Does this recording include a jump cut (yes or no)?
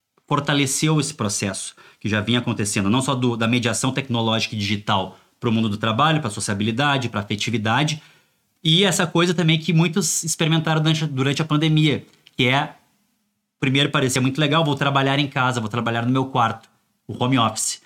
no